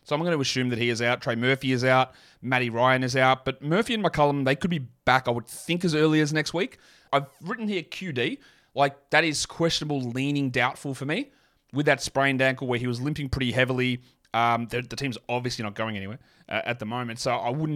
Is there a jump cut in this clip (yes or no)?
yes